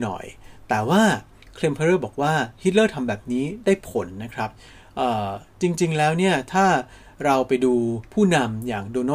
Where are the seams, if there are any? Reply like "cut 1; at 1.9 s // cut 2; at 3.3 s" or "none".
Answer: cut 1; at 8.1 s